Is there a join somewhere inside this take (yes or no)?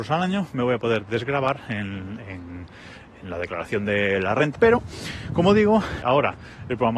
yes